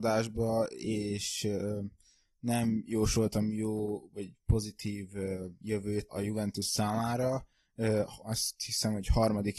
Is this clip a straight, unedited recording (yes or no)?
no